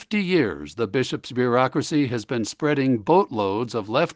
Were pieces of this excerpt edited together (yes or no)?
no